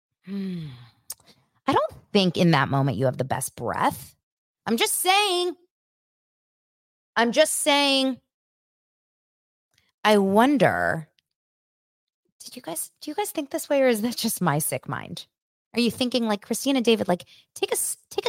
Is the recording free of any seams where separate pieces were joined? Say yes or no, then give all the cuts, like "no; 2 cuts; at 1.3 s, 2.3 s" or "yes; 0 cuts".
yes; 0 cuts